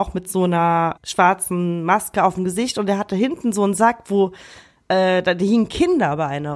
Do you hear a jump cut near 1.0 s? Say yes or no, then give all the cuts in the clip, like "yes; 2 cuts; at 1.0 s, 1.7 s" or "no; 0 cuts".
yes; 1 cut; at 1.0 s